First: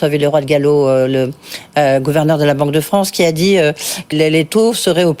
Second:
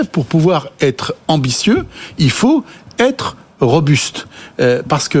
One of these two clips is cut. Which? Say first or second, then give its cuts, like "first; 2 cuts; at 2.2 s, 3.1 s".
first; 1 cut; at 4.1 s